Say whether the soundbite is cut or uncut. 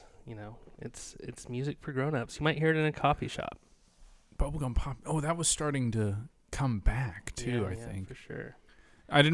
uncut